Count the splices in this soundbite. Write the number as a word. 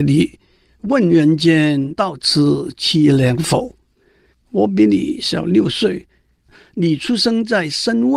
one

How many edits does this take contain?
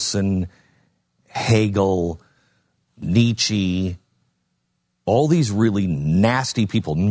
zero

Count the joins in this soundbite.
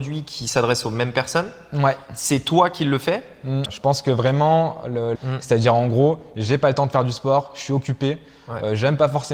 two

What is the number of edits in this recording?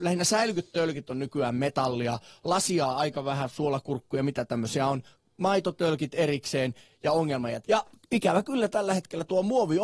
one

